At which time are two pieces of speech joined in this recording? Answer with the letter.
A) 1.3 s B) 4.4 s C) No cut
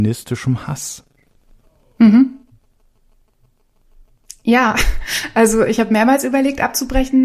C